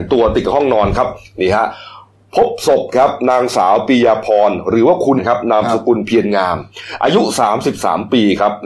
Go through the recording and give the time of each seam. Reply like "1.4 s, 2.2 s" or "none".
5.2 s